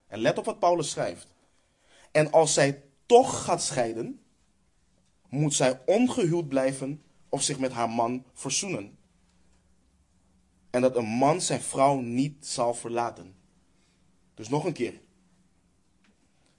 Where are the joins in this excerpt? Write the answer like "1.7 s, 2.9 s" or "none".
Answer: 5.2 s